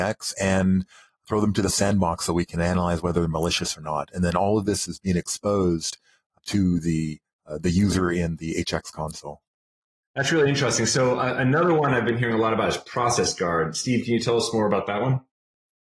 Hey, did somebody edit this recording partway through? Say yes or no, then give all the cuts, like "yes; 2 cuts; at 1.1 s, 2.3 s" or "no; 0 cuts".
no; 0 cuts